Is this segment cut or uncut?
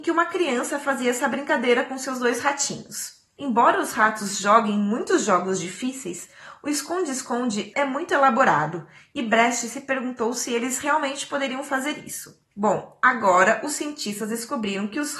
cut